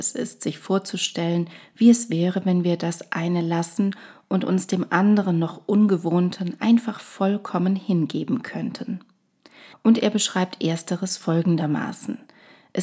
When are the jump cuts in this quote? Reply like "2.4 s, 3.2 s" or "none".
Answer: 9.7 s